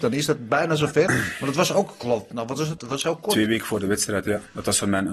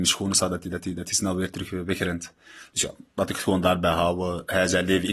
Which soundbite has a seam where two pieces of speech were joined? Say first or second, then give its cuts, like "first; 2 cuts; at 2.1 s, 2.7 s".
first; 1 cut; at 2.8 s